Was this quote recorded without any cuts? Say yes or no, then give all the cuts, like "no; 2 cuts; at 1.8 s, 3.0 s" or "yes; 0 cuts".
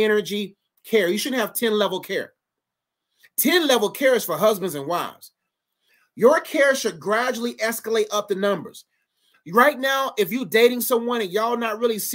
yes; 0 cuts